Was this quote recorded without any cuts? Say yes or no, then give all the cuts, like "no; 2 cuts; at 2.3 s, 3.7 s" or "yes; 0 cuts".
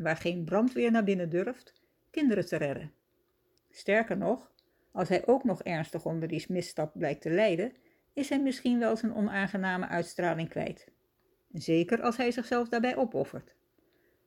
no; 2 cuts; at 3.6 s, 11.4 s